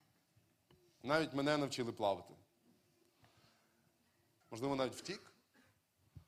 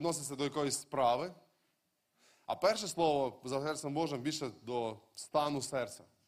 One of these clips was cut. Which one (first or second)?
first